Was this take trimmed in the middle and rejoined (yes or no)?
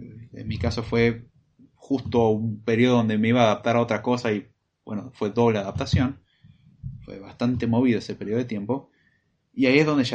no